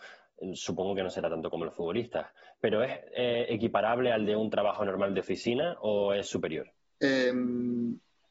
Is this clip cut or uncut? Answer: uncut